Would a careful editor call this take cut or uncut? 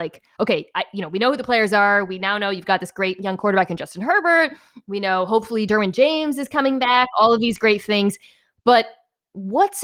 uncut